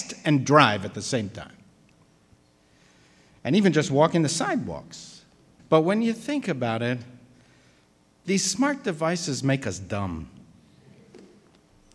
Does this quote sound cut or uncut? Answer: cut